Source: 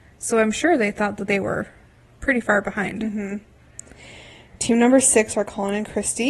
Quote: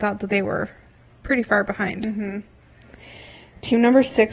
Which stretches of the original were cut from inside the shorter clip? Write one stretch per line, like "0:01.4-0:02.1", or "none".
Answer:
none